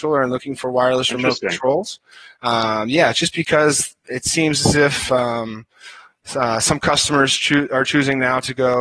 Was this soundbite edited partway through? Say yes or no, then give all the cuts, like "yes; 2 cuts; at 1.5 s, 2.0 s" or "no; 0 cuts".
no; 0 cuts